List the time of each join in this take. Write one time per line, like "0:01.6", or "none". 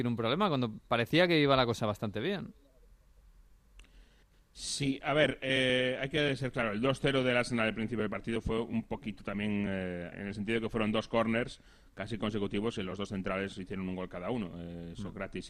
0:10.1